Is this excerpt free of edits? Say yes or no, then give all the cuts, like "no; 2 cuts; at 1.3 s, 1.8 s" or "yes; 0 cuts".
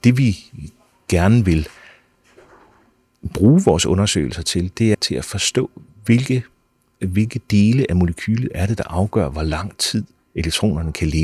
no; 1 cut; at 4.9 s